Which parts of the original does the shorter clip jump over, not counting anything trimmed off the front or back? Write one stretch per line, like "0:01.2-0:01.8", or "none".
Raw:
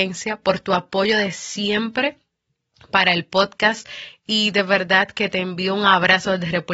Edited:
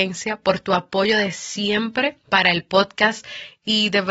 0:02.2-0:02.9